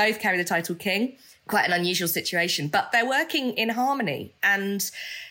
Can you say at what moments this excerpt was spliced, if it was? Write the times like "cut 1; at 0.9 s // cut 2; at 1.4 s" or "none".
none